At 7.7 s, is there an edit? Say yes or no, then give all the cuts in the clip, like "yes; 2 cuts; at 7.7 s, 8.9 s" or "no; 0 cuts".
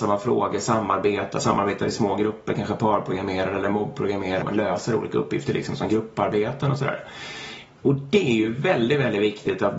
no; 1 cut; at 4.4 s